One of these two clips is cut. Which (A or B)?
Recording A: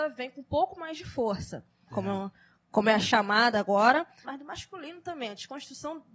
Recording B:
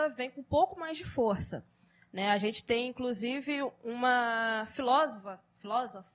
A